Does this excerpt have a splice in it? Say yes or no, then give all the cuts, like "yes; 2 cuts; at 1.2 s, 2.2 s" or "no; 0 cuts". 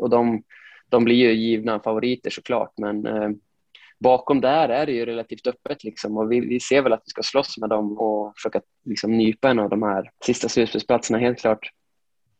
yes; 3 cuts; at 6.4 s, 8.0 s, 10.2 s